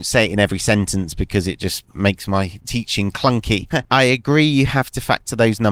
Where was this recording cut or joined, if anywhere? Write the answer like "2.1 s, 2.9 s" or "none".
3.7 s